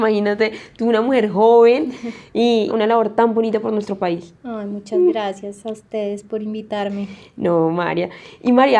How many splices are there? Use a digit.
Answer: 1